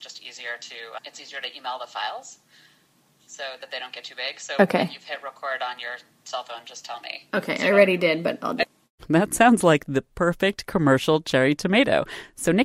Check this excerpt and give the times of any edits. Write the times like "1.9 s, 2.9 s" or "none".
1.0 s